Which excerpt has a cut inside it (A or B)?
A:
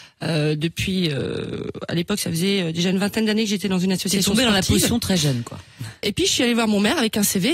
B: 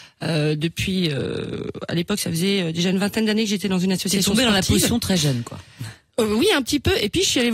A